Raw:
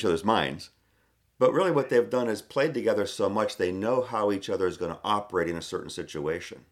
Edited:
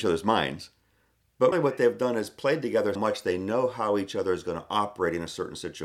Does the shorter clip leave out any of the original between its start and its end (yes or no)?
yes